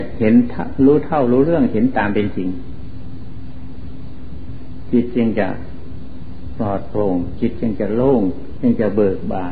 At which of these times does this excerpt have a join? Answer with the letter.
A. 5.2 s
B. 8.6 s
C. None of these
B